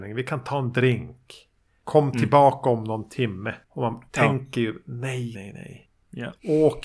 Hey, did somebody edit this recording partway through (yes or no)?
yes